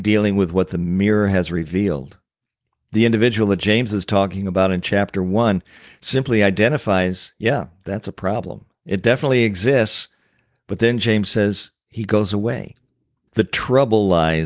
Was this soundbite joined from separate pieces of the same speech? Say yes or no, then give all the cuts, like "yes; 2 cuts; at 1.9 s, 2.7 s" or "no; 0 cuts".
yes; 1 cut; at 13.3 s